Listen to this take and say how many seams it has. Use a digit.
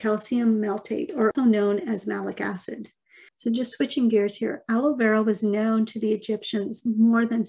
2